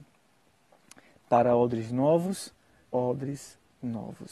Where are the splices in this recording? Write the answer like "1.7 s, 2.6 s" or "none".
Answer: 2.8 s